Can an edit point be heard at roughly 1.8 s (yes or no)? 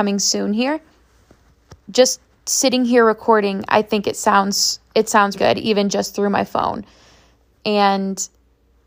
yes